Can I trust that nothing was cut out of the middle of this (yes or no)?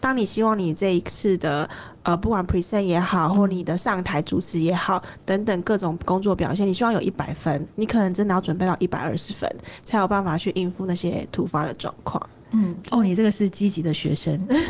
yes